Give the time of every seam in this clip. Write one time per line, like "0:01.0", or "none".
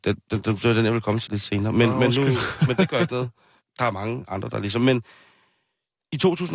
0:01.3